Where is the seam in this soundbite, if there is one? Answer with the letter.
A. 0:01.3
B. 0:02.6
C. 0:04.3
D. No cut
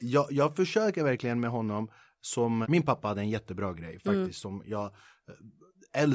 B